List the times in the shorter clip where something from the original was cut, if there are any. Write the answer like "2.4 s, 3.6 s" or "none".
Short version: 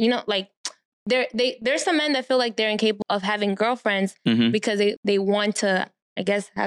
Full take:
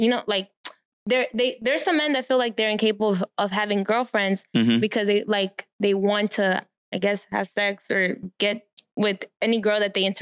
3.0 s, 5.0 s